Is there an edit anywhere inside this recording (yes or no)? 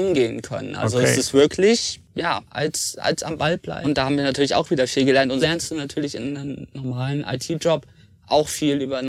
yes